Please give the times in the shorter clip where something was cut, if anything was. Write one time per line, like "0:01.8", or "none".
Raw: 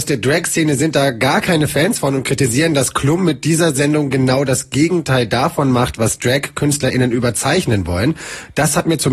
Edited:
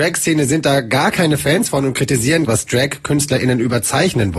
0:02.4